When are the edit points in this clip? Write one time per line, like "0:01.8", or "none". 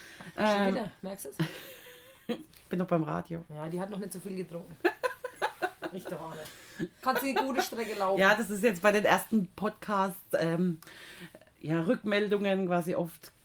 0:07.0